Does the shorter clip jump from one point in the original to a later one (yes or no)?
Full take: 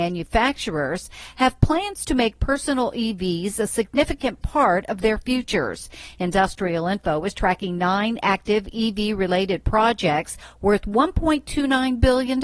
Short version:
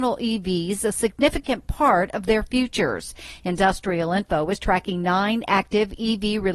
no